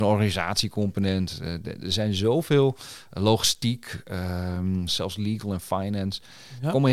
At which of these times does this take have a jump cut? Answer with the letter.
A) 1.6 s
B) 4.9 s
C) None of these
B